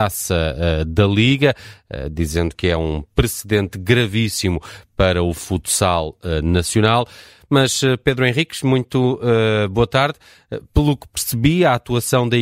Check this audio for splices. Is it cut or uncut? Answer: uncut